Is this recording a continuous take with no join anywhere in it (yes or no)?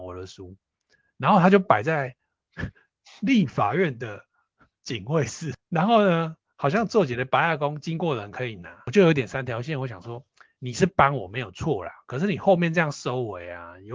yes